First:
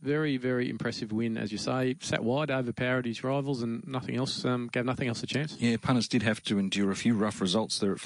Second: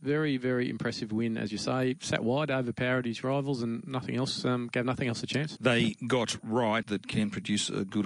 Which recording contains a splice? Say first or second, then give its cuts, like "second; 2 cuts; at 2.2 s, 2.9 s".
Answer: second; 2 cuts; at 5.6 s, 6.8 s